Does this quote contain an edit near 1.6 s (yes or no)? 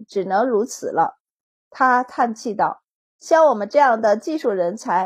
no